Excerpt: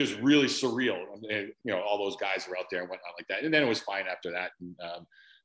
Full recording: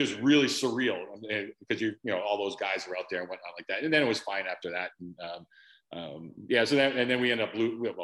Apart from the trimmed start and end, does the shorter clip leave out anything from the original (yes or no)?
yes